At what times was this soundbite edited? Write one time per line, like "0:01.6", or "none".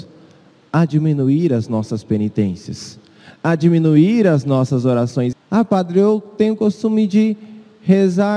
0:05.3